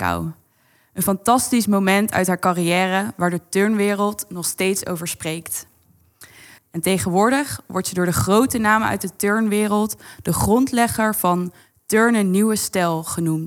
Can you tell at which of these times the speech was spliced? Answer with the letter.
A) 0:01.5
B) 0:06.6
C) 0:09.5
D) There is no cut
B